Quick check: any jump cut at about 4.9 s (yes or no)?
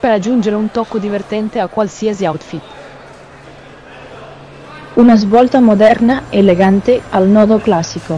yes